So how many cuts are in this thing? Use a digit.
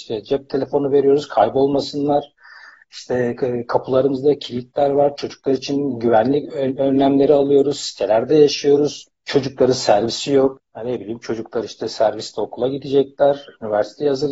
2